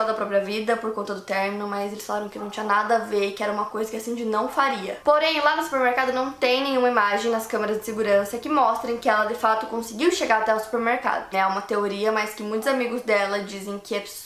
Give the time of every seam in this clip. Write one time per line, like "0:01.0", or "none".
0:05.0
0:11.3